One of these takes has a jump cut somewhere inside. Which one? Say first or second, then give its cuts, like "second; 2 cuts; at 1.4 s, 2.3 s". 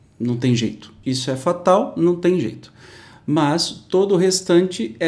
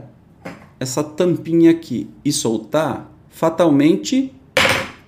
first; 1 cut; at 1.0 s